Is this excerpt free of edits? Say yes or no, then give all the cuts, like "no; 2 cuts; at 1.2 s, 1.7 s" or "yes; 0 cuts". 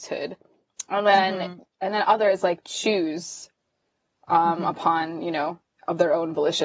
yes; 0 cuts